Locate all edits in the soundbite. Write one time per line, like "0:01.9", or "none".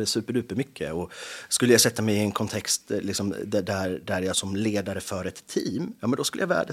0:04.3